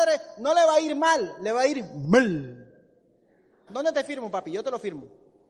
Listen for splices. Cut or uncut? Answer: cut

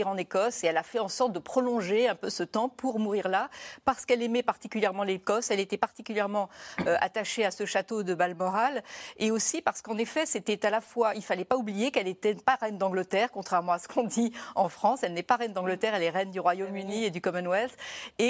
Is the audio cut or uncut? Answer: uncut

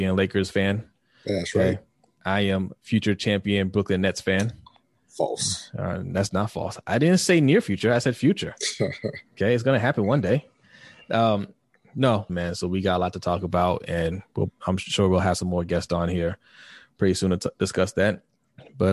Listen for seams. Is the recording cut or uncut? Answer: cut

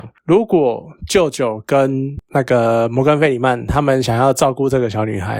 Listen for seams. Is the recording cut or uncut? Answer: uncut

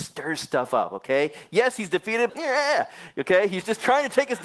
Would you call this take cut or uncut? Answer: cut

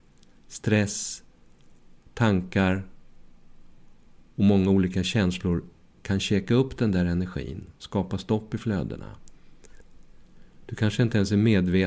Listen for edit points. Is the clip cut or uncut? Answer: uncut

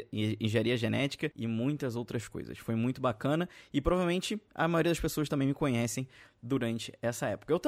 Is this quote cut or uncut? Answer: uncut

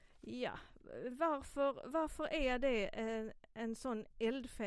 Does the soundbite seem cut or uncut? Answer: uncut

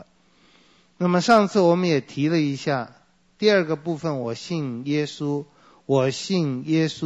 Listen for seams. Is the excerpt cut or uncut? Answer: uncut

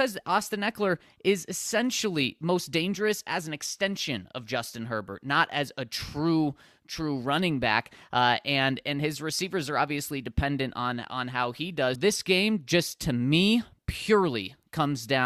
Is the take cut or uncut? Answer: cut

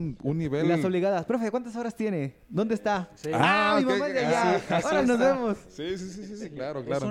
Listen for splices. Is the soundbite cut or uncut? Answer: uncut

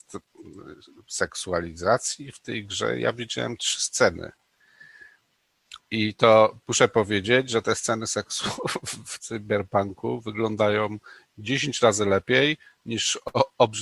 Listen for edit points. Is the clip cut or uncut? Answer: uncut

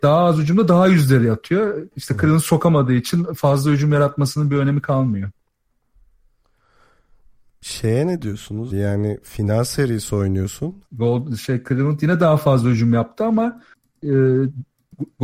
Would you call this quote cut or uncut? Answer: cut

